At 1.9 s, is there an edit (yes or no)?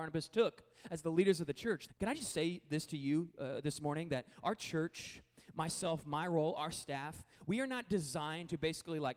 yes